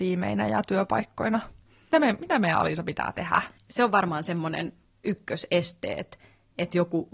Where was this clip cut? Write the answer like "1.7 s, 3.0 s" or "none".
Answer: 3.6 s